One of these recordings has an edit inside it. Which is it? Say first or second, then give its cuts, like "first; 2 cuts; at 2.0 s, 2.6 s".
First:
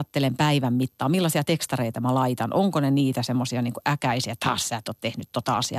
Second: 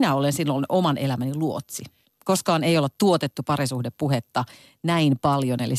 second; 1 cut; at 2.1 s